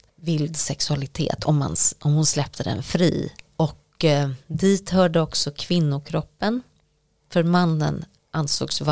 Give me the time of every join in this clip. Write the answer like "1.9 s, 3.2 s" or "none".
3.5 s

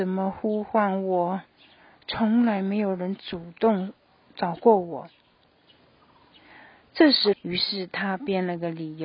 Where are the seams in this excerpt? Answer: 7.3 s

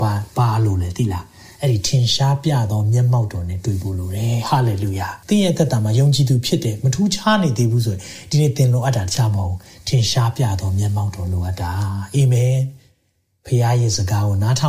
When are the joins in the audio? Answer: 5.2 s

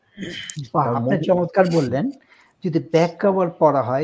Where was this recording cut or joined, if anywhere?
none

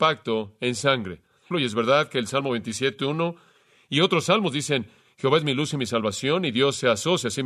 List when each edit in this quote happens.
1.5 s

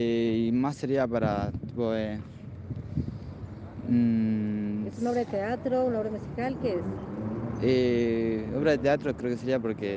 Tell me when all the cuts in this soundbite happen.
none

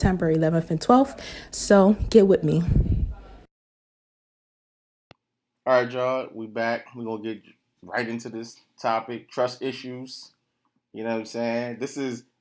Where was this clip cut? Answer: none

